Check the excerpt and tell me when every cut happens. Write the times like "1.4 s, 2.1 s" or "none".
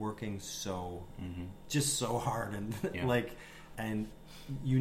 3.7 s